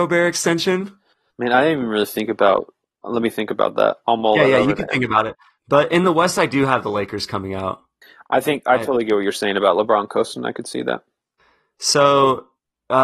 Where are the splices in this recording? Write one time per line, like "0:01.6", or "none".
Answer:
0:01.3